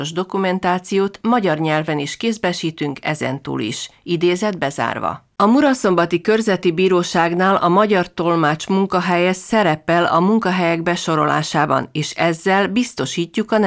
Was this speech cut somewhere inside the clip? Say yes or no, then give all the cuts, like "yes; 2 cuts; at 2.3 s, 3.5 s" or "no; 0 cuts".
yes; 1 cut; at 5.4 s